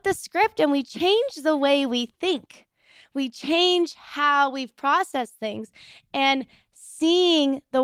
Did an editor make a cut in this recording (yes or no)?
no